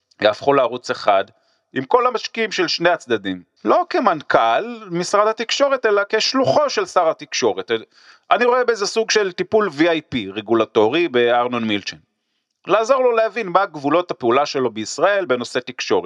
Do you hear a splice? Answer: yes; 1 cut; at 3.6 s

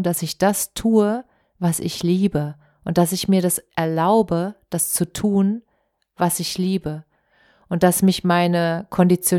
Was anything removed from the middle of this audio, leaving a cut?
no; 0 cuts

